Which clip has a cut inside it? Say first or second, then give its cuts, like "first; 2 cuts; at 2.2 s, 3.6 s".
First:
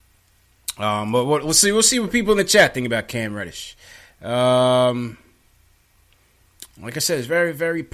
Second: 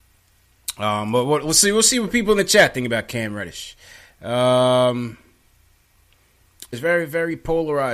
second; 1 cut; at 6.7 s